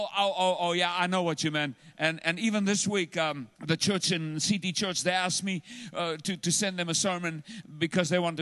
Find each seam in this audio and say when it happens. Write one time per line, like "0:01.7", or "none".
0:03.6